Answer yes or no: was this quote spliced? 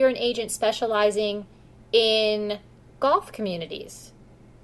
no